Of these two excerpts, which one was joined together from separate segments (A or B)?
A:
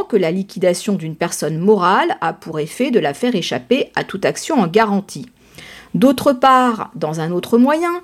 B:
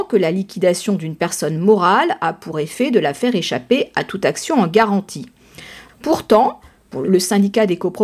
B